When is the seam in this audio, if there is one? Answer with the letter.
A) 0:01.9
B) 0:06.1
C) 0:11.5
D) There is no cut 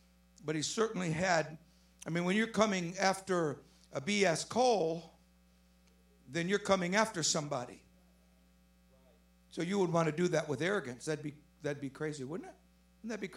D